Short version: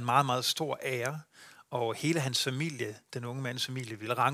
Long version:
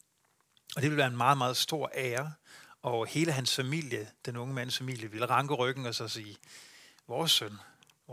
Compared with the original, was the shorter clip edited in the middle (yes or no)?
no